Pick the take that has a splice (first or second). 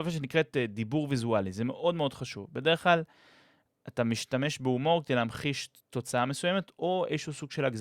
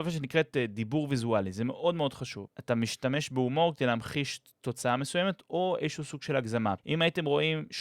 second